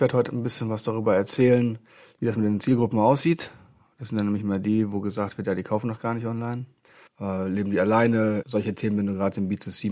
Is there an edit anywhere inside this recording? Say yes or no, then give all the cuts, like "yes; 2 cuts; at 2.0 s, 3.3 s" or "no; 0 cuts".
yes; 2 cuts; at 7.1 s, 8.4 s